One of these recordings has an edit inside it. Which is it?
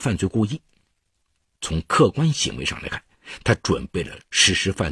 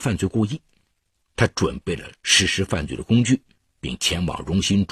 second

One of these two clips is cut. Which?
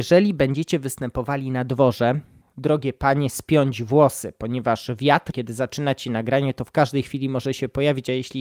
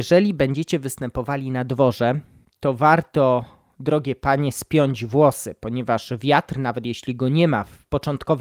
first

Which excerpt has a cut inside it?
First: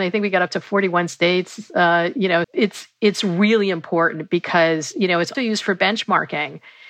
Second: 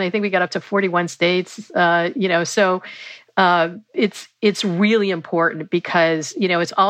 first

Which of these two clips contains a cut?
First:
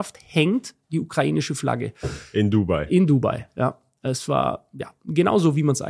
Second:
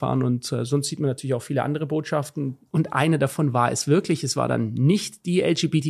second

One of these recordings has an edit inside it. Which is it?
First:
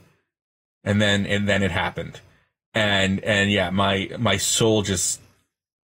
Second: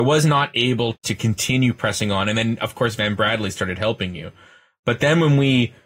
second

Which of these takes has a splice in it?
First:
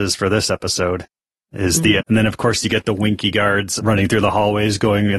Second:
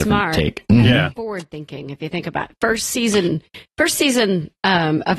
first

